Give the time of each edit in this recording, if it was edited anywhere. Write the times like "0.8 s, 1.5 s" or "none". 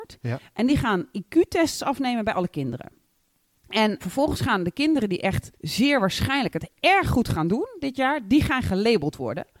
4.0 s, 5.5 s